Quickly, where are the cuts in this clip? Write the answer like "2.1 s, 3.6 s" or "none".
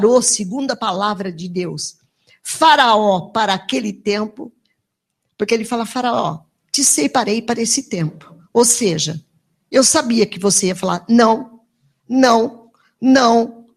none